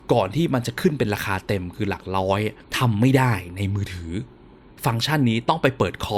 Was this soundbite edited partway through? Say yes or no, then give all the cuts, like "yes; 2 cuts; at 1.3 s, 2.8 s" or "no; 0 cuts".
yes; 1 cut; at 2.6 s